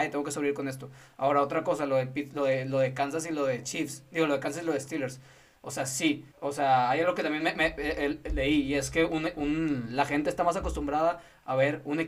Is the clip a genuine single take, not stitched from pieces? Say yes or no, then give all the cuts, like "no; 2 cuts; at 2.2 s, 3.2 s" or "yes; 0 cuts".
no; 1 cut; at 6.3 s